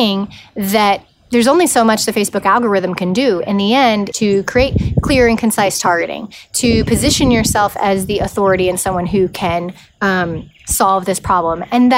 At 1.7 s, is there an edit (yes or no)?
no